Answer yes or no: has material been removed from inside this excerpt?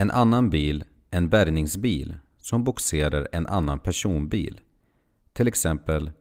no